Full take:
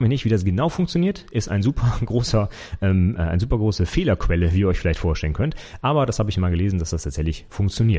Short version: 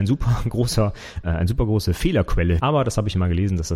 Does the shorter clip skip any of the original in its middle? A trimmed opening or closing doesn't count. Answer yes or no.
yes